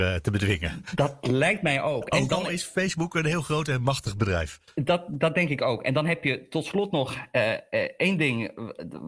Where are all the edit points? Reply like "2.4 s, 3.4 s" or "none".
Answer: none